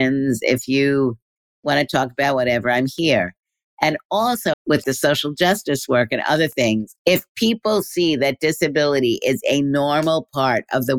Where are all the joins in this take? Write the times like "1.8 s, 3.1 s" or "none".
4.5 s, 7.0 s